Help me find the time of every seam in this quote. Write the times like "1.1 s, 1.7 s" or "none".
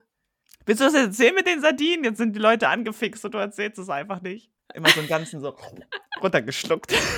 4.6 s